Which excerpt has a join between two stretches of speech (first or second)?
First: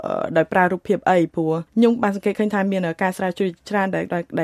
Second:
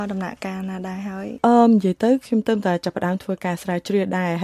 first